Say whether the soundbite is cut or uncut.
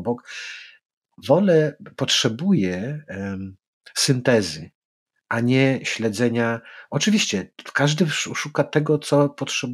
uncut